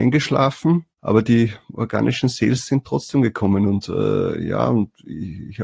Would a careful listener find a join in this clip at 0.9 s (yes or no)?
yes